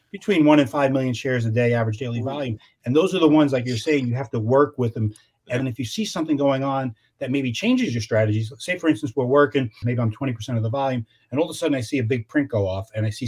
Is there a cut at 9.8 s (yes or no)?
yes